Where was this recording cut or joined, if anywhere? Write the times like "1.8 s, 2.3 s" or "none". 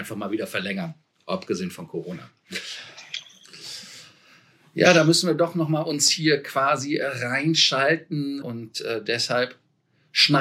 8.4 s